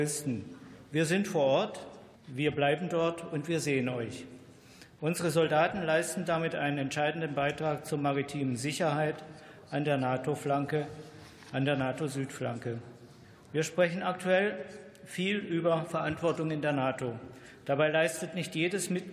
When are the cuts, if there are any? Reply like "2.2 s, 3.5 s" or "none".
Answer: 2.1 s